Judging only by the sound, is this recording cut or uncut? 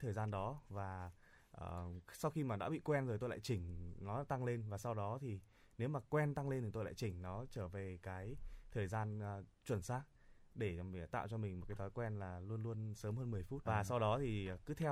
cut